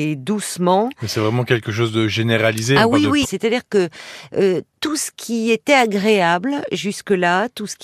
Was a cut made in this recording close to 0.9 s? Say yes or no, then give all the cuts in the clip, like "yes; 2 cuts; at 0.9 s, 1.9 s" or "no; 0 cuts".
no; 1 cut; at 3.2 s